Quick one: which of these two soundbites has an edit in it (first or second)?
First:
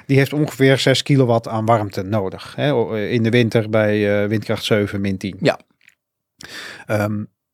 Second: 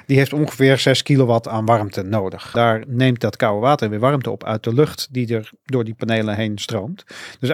second